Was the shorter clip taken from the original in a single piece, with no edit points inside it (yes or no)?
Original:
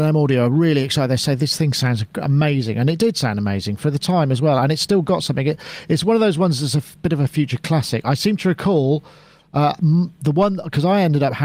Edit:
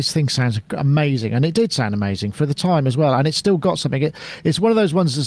yes